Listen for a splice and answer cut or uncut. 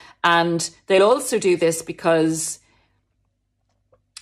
uncut